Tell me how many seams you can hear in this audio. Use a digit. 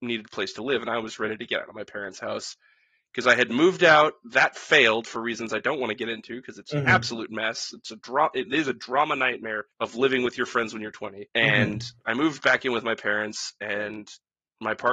2